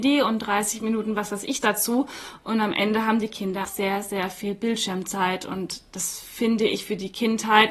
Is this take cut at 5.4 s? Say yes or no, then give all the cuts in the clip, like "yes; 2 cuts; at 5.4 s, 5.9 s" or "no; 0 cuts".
no; 1 cut; at 3.6 s